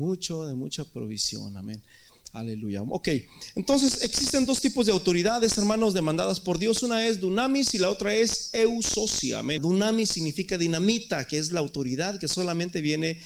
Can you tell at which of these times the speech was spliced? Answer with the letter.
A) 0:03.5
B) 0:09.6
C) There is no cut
B